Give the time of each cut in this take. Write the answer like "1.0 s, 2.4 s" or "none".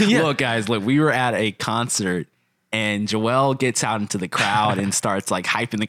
none